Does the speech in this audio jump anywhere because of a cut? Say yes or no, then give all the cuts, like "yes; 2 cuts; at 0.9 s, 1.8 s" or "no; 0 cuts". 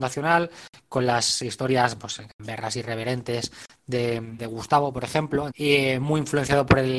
yes; 2 cuts; at 4.4 s, 5.5 s